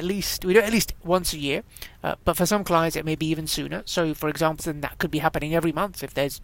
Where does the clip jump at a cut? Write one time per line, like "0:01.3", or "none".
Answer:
0:04.6